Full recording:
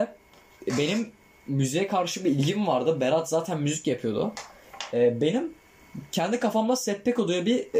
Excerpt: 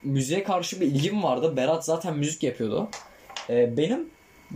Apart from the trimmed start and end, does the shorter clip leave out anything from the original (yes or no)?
no